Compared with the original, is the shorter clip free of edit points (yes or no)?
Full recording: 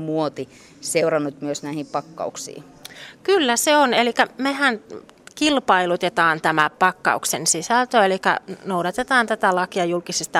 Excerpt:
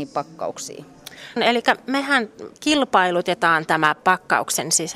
no